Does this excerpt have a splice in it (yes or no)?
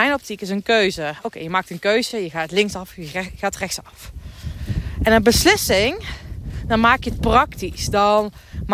no